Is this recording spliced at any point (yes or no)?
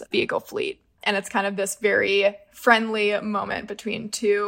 yes